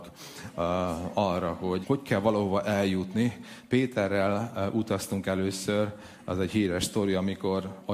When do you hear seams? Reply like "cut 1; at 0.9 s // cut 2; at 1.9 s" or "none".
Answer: cut 1; at 1.8 s